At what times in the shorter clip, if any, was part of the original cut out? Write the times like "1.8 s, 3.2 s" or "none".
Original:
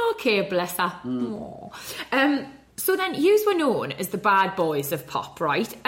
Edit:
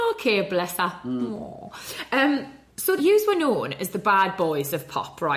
3.0 s